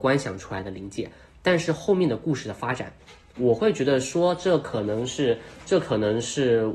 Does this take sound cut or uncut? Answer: uncut